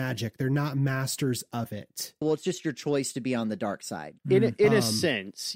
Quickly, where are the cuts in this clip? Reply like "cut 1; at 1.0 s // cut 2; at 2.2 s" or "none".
cut 1; at 2.2 s // cut 2; at 4.2 s